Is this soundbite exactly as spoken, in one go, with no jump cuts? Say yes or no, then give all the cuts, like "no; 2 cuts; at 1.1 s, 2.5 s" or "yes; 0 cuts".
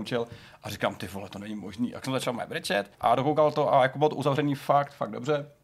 no; 1 cut; at 2.9 s